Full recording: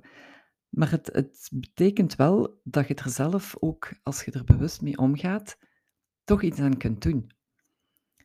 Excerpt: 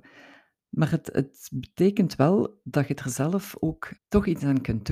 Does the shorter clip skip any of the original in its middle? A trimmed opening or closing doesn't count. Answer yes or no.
yes